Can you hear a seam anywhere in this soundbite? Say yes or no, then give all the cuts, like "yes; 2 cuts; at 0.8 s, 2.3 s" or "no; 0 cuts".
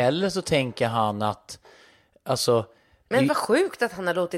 no; 0 cuts